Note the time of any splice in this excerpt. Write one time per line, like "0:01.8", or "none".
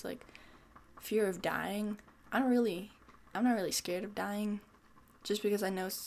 0:03.3
0:05.1